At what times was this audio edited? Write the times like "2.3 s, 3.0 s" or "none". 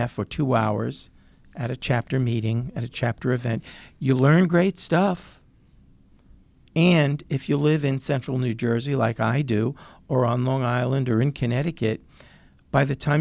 none